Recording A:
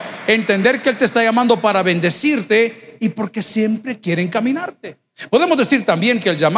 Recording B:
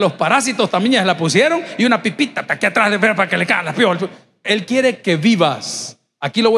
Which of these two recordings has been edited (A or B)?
B